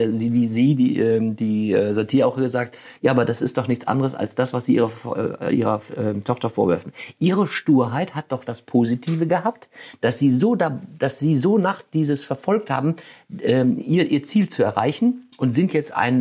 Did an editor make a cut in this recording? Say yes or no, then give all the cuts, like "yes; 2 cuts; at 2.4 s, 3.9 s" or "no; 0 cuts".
no; 0 cuts